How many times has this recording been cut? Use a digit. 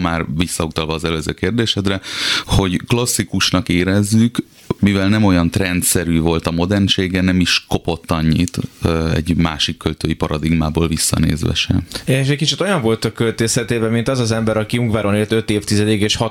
2